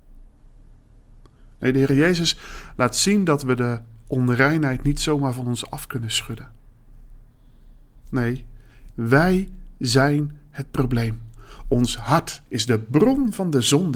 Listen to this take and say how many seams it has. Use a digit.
2